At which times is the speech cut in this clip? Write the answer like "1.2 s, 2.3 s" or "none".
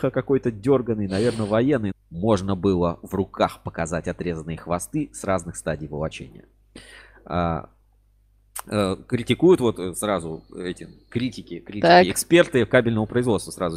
1.9 s